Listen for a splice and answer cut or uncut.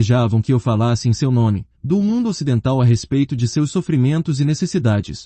cut